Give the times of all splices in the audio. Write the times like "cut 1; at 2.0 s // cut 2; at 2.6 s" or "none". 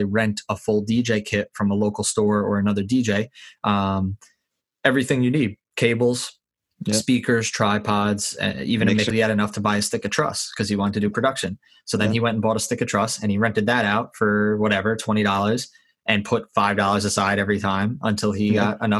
cut 1; at 9.1 s